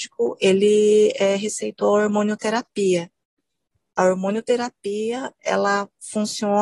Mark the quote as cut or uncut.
uncut